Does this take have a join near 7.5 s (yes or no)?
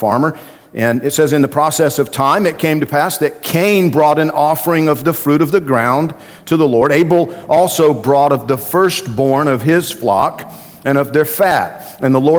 no